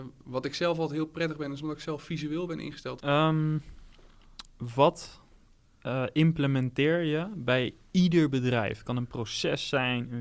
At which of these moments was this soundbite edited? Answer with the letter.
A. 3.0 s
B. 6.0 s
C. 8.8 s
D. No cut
A